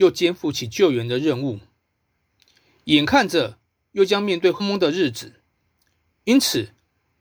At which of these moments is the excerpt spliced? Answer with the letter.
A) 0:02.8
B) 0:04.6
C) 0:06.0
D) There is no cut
B